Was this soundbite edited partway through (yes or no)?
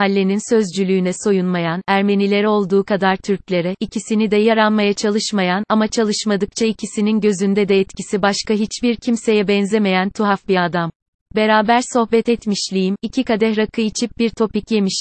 yes